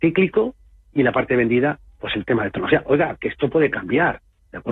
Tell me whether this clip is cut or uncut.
uncut